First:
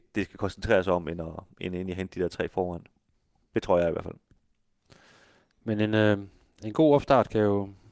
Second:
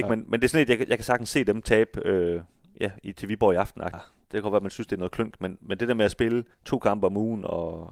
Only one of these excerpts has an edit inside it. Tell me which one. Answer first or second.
second